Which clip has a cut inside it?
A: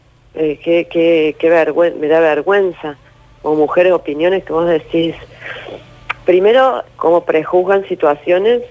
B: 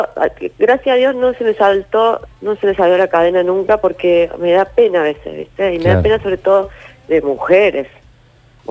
A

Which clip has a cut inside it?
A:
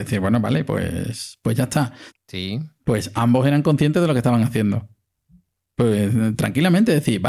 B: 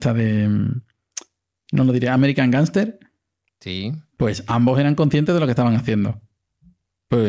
A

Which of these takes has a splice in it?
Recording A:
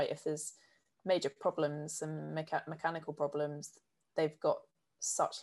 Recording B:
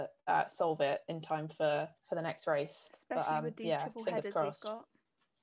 B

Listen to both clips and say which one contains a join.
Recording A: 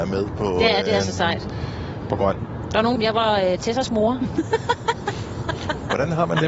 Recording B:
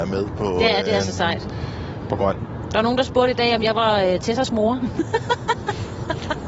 A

